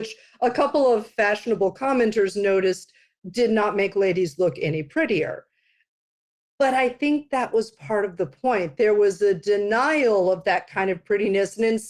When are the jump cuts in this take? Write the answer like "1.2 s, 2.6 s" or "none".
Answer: none